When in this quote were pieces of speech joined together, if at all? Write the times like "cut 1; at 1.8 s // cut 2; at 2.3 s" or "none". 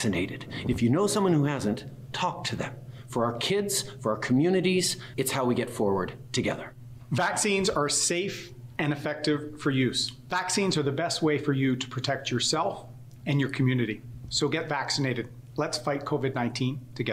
cut 1; at 5.1 s // cut 2; at 13.2 s